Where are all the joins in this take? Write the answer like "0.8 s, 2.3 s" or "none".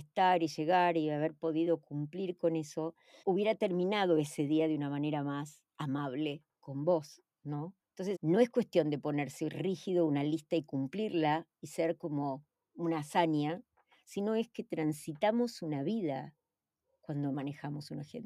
3.2 s, 8.1 s